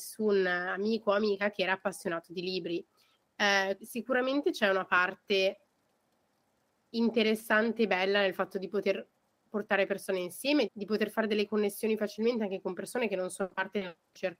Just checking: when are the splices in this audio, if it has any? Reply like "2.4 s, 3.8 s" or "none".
3.8 s, 10.7 s